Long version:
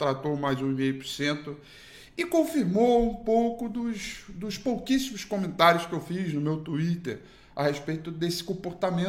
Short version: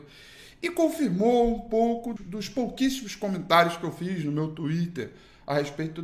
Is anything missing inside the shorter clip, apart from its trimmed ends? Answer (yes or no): yes